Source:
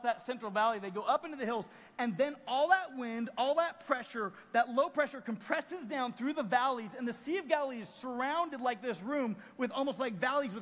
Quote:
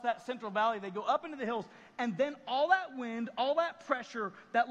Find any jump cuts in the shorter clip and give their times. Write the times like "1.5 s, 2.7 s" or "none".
none